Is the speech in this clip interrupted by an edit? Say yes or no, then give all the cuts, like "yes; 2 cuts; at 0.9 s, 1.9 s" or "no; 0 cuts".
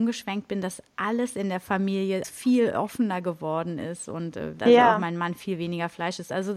yes; 2 cuts; at 2.2 s, 4.6 s